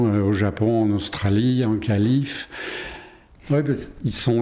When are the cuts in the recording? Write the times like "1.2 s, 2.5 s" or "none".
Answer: 3.3 s